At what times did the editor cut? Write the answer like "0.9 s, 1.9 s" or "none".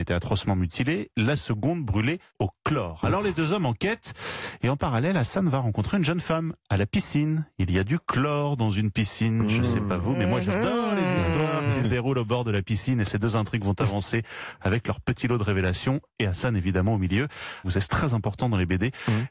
2.3 s, 17.6 s